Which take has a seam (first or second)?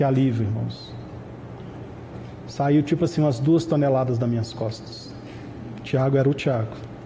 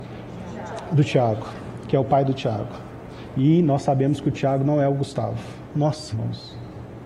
second